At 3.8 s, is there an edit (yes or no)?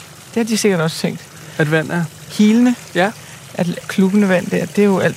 yes